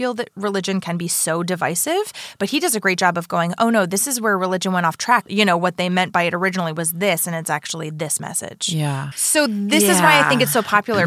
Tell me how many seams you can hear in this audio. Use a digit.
2